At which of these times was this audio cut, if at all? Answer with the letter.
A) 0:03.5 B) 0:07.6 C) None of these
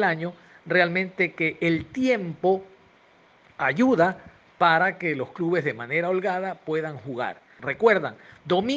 B